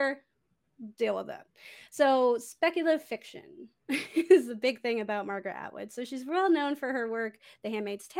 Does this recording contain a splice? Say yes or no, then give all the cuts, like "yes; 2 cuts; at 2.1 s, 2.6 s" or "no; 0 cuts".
no; 0 cuts